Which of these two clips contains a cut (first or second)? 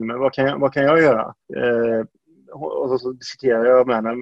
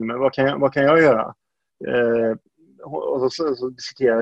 first